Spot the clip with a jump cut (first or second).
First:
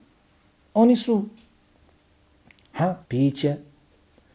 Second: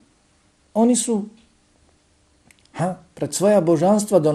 first